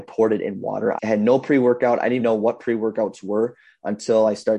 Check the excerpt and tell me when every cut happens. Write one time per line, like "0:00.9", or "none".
0:01.0
0:02.2